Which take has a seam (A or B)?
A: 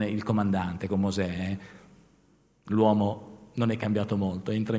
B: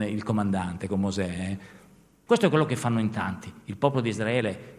B